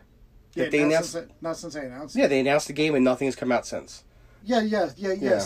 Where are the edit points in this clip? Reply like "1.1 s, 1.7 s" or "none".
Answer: 4.4 s